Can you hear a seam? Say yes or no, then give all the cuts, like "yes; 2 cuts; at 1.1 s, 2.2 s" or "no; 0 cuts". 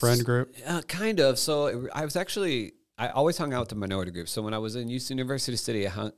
no; 0 cuts